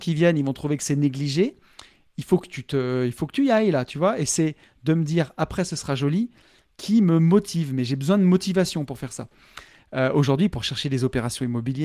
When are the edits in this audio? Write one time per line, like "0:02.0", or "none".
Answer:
none

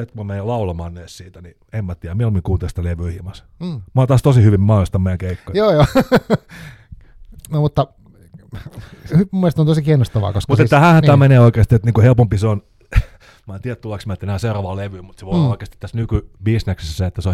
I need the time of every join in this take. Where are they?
0:09.1

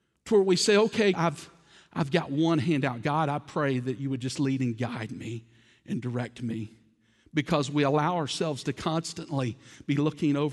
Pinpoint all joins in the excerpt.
0:01.1

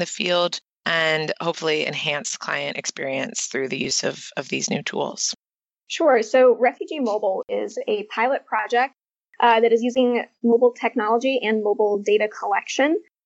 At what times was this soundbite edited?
0:05.8

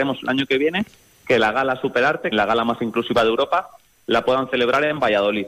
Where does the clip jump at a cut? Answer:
0:02.3

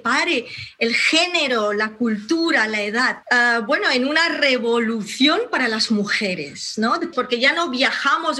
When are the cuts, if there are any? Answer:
0:03.2
0:07.1

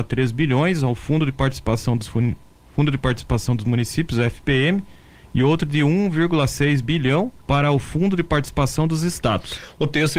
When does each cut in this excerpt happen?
0:07.4

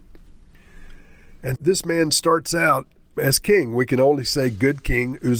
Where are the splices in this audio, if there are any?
0:01.6

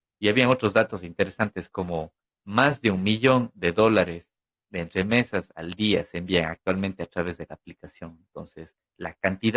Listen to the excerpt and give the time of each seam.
none

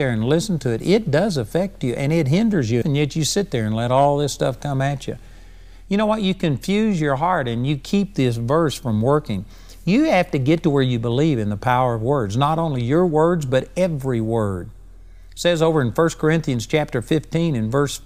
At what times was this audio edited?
0:02.8

